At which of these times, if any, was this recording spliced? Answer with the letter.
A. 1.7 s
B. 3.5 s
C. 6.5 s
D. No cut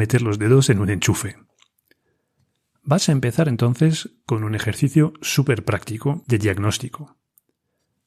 D